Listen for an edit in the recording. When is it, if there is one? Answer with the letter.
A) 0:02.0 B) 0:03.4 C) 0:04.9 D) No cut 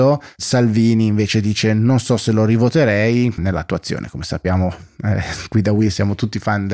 B